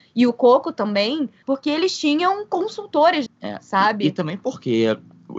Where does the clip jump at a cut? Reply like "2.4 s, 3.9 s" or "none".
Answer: 1.4 s, 3.3 s